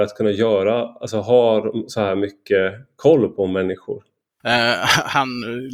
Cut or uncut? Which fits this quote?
cut